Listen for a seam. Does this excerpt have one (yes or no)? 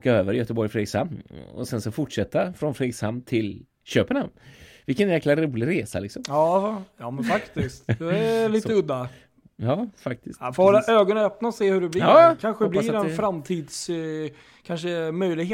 no